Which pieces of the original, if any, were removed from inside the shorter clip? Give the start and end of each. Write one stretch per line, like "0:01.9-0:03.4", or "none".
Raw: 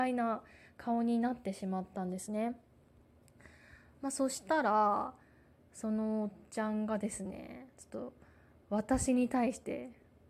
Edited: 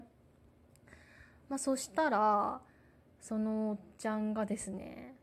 none